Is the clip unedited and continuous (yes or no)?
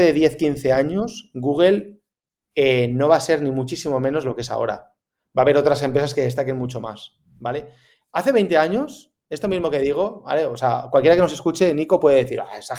yes